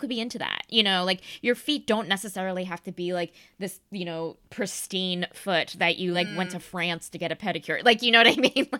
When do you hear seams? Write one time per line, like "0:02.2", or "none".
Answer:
none